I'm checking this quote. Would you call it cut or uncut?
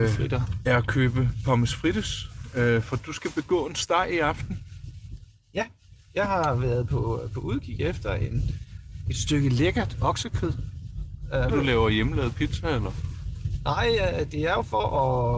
cut